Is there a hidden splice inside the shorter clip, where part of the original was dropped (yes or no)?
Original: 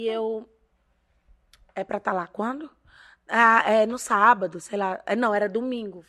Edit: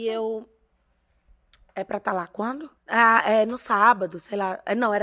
yes